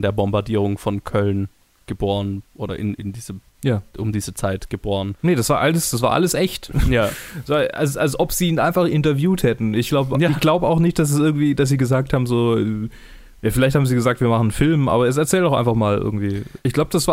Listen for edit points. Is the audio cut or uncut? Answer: uncut